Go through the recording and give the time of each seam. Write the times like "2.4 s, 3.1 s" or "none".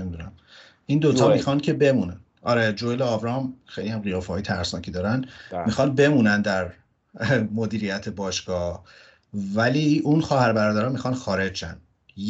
none